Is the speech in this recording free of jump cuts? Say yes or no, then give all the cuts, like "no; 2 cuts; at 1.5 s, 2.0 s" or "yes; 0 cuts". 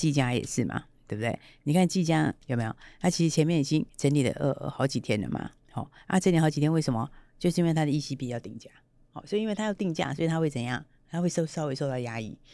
no; 2 cuts; at 2.4 s, 3.9 s